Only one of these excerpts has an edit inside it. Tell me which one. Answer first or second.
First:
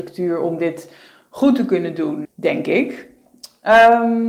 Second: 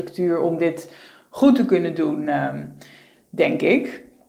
first